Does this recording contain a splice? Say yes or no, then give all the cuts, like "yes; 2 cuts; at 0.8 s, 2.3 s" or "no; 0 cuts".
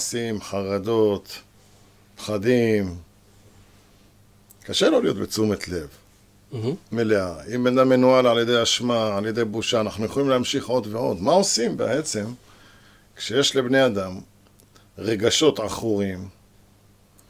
no; 0 cuts